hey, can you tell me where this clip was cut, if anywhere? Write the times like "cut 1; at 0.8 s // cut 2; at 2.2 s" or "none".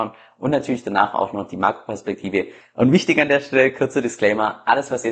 cut 1; at 2.6 s

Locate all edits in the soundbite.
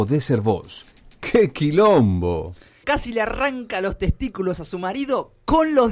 cut 1; at 2.8 s

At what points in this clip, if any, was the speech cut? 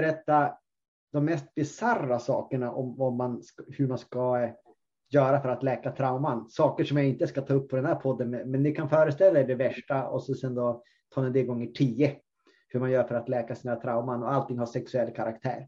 none

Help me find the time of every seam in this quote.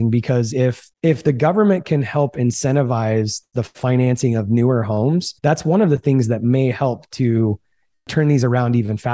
cut 1; at 0.9 s // cut 2; at 5.4 s

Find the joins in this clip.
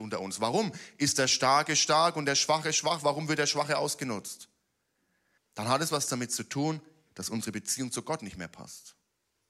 cut 1; at 5.4 s // cut 2; at 7.1 s

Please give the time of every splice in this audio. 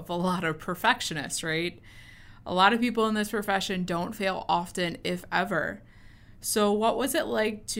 none

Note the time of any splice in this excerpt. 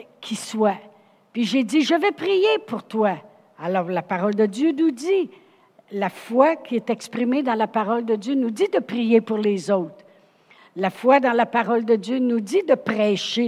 none

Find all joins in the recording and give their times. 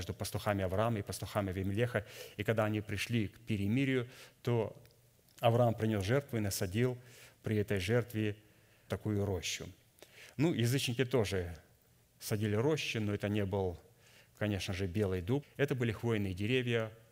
cut 1; at 8.9 s // cut 2; at 15.4 s

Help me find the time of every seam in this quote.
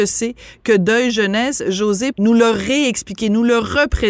cut 1; at 2.1 s

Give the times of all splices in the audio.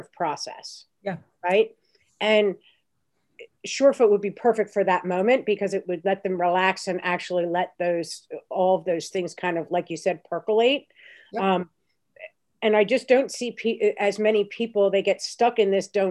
none

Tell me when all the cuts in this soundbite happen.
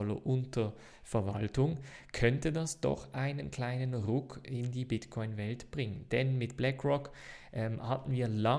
none

